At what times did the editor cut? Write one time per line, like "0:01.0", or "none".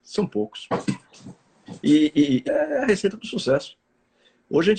0:02.5

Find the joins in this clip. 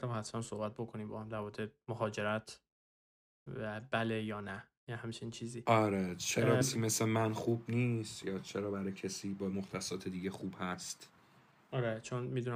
0:06.6

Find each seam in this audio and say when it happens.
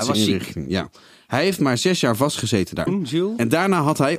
0:02.9

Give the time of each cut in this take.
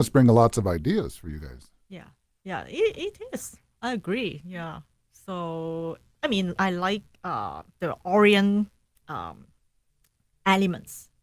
0:06.6

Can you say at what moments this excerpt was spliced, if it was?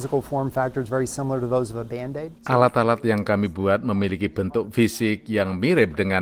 0:02.4

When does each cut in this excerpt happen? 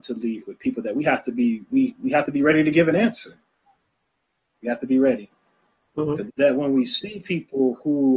0:06.3

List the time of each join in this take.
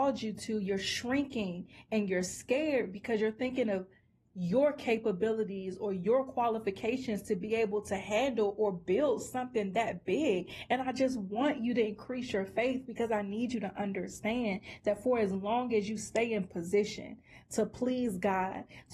none

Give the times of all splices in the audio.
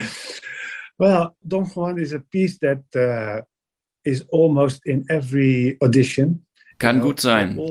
none

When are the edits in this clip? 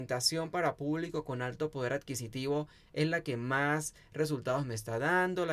none

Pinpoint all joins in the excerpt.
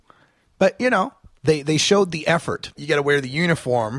0:02.7

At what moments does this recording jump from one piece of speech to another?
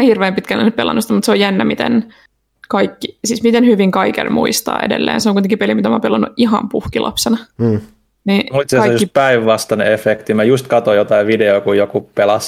none

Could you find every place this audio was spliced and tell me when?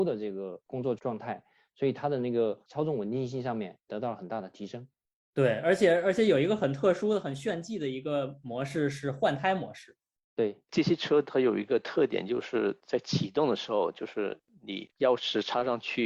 none

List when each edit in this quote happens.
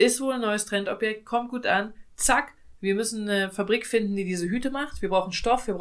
none

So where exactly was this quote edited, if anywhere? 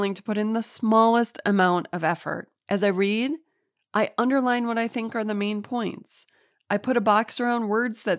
0:02.6

